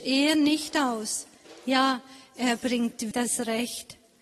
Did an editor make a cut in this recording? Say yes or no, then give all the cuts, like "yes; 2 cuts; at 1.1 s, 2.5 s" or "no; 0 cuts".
yes; 1 cut; at 3.1 s